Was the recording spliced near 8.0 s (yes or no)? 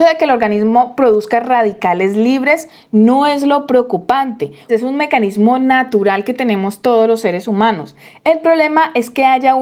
no